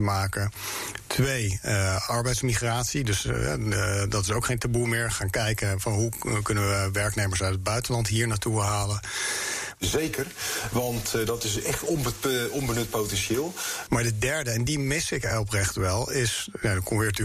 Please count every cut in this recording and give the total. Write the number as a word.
two